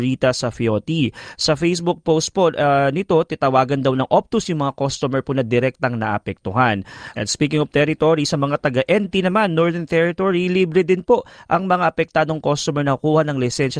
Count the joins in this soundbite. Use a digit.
1